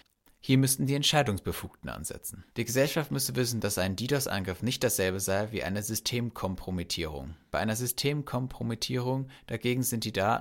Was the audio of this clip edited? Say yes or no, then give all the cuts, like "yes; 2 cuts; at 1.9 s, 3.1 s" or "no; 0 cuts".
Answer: yes; 2 cuts; at 2.5 s, 7.5 s